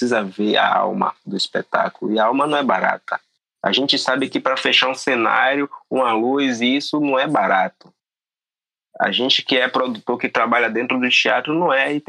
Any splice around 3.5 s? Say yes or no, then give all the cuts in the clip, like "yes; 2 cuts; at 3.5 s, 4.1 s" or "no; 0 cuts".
no; 0 cuts